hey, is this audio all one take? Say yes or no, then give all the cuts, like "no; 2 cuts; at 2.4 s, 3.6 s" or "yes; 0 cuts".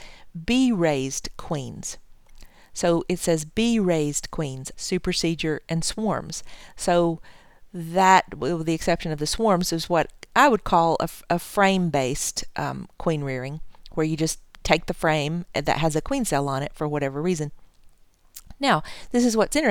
no; 1 cut; at 4.7 s